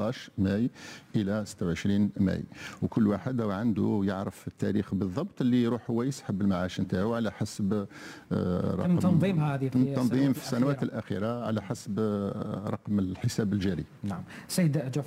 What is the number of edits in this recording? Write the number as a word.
zero